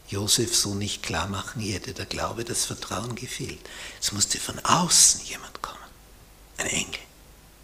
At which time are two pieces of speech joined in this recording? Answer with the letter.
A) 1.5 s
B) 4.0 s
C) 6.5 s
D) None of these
D